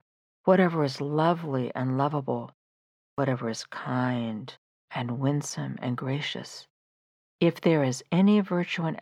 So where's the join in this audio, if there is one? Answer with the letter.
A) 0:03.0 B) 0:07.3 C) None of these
C